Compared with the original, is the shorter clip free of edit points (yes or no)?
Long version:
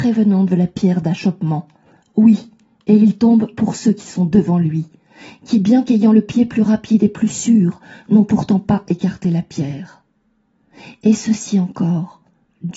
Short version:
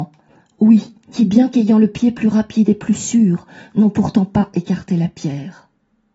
no